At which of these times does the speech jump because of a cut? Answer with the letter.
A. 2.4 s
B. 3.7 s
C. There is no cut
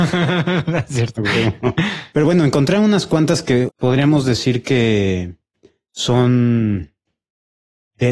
B